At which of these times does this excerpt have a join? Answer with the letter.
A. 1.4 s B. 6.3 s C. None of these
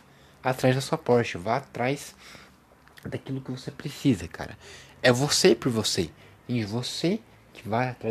C